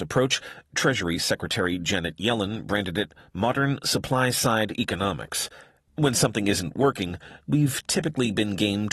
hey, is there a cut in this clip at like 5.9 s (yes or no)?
yes